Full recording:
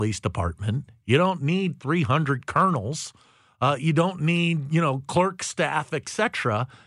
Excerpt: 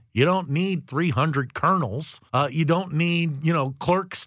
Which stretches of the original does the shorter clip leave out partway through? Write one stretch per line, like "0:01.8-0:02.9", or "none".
0:03.2-0:03.5